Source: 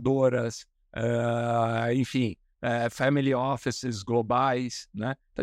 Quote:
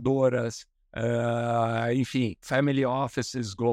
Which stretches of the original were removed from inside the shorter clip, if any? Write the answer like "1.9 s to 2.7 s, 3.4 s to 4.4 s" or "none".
2.4 s to 2.9 s